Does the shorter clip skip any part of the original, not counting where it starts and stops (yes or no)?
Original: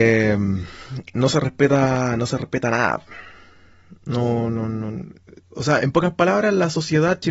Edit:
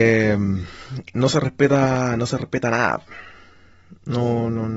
no